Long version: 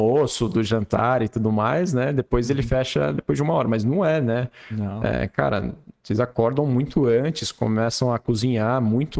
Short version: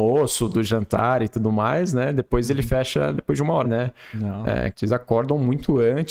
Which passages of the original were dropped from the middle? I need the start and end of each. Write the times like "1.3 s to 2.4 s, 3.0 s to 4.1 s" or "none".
3.6 s to 4.2 s, 5.3 s to 6.0 s